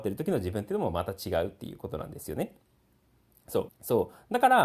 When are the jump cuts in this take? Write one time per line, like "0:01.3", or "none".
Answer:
0:03.7